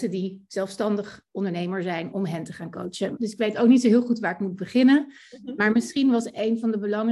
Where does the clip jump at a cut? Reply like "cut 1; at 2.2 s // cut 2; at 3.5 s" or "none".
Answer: cut 1; at 2.1 s // cut 2; at 3.2 s